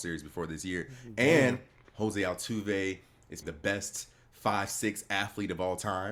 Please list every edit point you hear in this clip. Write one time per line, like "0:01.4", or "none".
0:01.8
0:03.4